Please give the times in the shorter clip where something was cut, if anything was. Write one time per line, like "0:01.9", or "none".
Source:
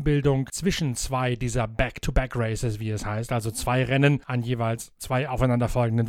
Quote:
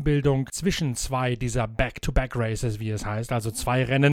none